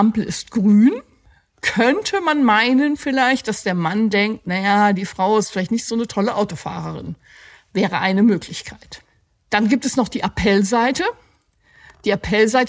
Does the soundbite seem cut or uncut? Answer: uncut